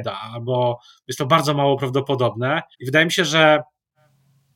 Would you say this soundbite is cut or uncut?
cut